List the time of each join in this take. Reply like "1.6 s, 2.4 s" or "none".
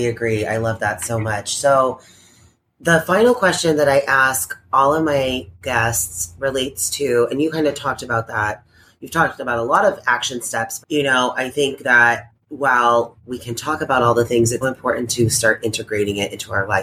10.8 s, 14.6 s